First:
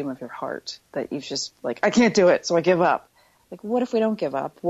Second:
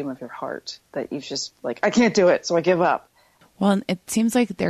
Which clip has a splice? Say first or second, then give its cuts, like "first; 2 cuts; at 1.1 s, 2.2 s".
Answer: second; 1 cut; at 3.4 s